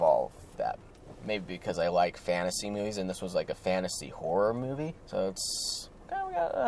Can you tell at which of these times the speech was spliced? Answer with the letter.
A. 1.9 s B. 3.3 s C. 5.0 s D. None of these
C